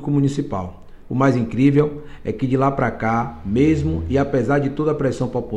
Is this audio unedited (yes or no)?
no